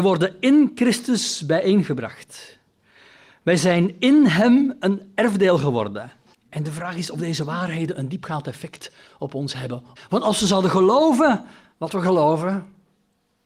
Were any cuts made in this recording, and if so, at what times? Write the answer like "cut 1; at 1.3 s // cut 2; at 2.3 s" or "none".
cut 1; at 6.3 s // cut 2; at 10.0 s